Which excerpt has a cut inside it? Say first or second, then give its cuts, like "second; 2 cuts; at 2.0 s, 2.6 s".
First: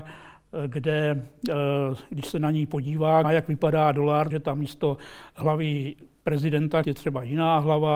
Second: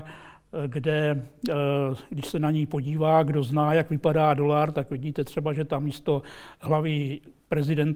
first; 3 cuts; at 3.2 s, 4.3 s, 6.8 s